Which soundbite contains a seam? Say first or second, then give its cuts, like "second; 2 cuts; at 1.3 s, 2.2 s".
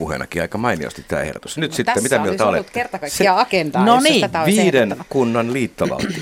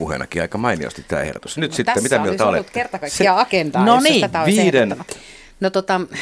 second; 1 cut; at 5.1 s